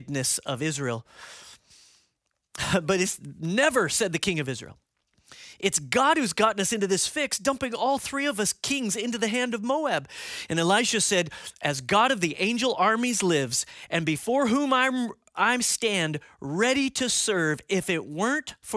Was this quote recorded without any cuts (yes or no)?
yes